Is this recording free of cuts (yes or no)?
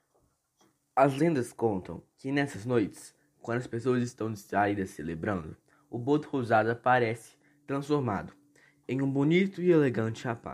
yes